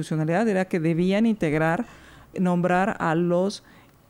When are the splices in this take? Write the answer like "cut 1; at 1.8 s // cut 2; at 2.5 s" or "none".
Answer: cut 1; at 2.3 s